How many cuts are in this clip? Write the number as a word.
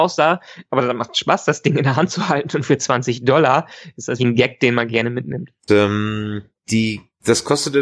two